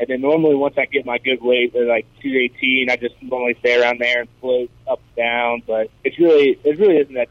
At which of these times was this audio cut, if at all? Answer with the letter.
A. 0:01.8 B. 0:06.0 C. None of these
B